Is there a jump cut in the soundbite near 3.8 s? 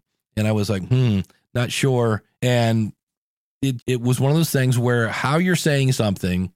yes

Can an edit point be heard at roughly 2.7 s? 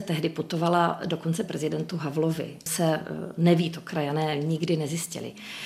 yes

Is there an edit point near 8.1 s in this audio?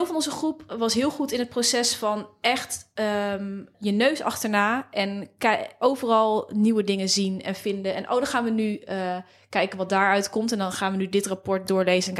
no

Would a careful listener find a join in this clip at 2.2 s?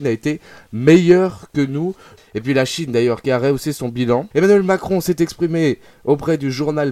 yes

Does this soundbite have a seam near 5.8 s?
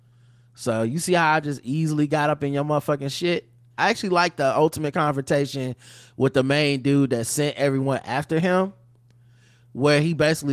no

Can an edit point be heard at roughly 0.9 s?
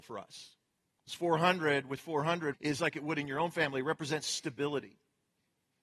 no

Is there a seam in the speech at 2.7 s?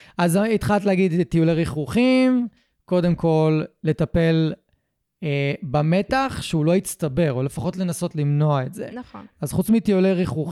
no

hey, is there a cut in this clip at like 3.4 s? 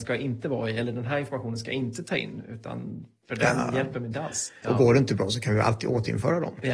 no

